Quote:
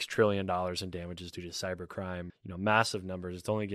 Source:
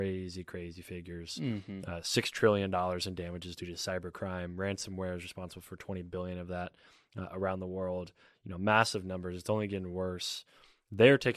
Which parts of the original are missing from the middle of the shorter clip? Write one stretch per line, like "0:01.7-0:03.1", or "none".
0:04.5-0:08.3